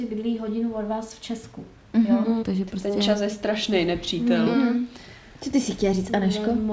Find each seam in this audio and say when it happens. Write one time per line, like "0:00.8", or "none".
0:02.4